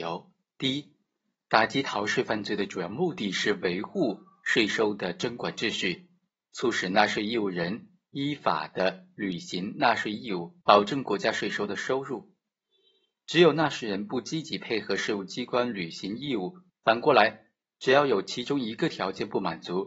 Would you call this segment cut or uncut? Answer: cut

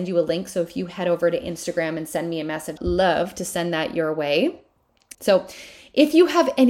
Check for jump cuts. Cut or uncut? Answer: cut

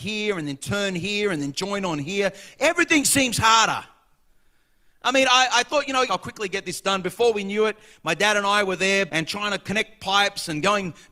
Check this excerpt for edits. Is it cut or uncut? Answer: cut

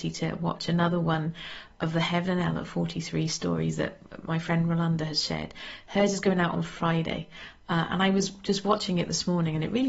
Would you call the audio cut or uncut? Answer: uncut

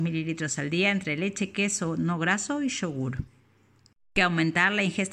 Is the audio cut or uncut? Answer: cut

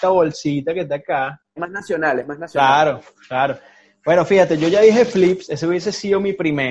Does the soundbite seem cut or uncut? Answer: cut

